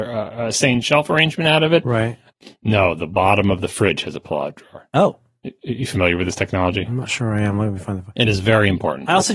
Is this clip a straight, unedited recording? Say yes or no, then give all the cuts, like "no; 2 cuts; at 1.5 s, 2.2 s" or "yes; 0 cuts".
no; 1 cut; at 2.3 s